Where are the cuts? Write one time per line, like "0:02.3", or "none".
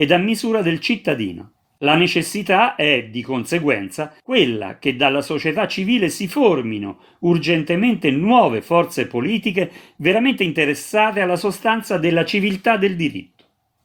none